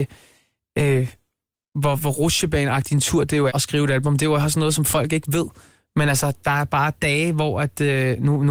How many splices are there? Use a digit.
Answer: 1